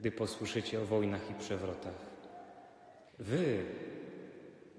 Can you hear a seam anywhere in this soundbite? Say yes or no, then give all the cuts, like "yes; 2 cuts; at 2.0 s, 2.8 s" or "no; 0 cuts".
yes; 1 cut; at 3.1 s